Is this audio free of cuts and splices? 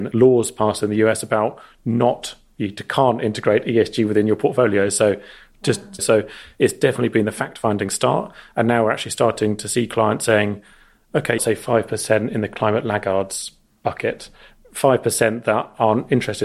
no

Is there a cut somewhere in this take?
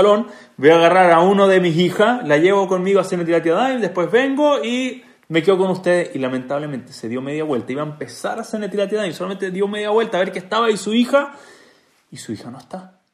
no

